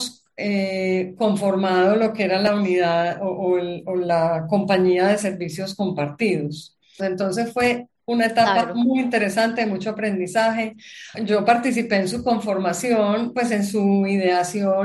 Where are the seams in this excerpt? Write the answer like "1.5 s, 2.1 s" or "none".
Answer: 7.0 s, 11.1 s